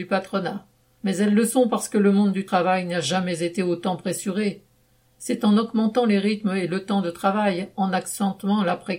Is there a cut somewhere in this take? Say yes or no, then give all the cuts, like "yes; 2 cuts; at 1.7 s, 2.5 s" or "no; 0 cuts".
no; 0 cuts